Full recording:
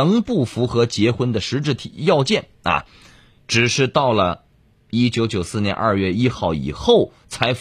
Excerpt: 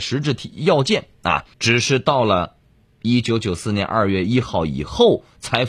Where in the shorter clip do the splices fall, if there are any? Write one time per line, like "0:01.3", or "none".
0:01.5